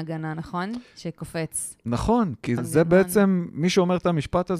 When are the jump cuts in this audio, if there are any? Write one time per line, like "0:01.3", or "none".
0:02.6